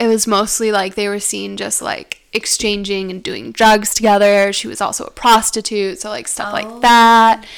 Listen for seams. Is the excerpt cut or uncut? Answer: uncut